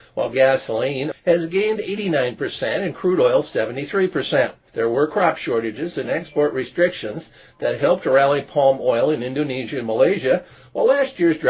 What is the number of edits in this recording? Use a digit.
3